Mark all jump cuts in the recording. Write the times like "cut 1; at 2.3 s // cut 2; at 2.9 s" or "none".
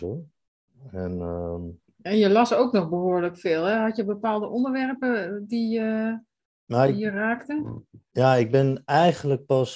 none